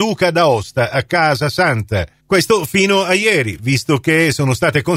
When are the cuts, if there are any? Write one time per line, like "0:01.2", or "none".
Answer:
0:02.2